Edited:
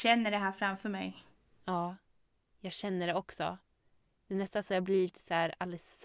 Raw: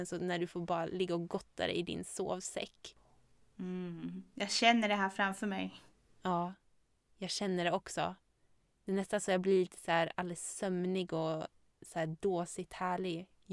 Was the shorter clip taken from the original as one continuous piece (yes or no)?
yes